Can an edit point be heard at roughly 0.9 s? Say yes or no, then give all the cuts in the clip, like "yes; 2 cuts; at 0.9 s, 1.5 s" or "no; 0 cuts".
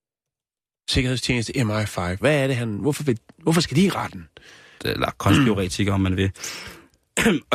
no; 2 cuts; at 2.2 s, 4.8 s